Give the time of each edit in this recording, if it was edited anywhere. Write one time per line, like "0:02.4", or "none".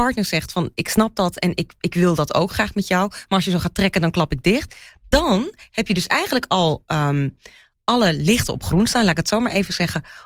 none